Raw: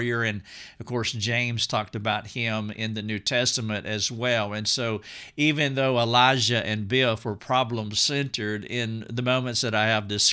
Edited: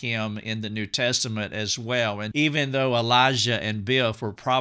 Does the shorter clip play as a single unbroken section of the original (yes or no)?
no